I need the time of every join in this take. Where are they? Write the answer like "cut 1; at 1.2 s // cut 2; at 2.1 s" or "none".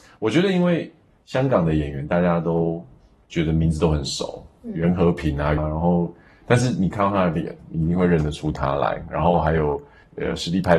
cut 1; at 5.6 s